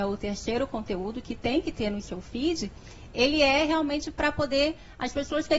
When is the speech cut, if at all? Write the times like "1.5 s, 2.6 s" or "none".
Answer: none

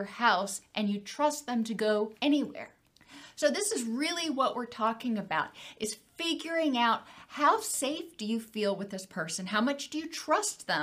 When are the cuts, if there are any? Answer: 2.2 s

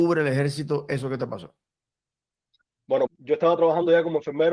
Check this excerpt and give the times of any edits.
3.1 s

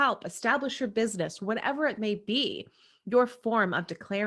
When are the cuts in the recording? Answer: none

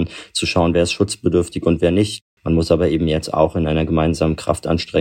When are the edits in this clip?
2.4 s

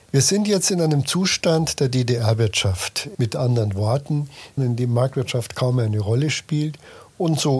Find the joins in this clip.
3.1 s, 4.6 s

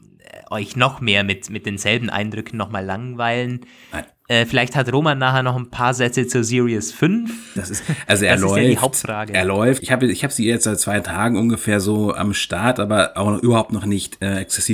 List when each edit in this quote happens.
7.6 s, 9.8 s

